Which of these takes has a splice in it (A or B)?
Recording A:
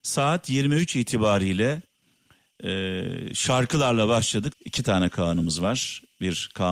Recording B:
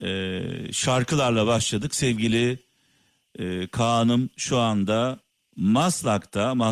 A